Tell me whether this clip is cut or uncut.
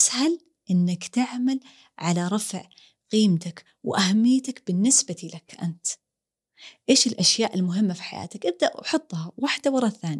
uncut